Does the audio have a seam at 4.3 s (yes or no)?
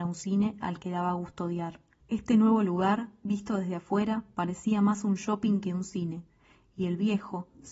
no